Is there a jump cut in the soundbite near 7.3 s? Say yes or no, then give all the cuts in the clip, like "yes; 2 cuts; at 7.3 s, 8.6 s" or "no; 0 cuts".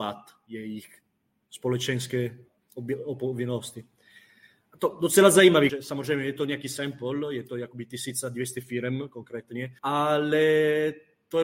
no; 2 cuts; at 5.7 s, 9.8 s